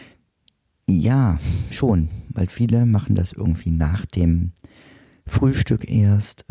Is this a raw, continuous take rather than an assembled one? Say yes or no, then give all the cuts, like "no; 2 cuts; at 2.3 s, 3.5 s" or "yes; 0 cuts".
yes; 0 cuts